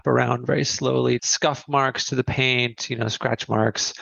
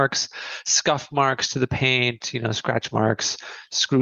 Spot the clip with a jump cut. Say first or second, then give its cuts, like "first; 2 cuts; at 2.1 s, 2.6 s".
first; 1 cut; at 1.2 s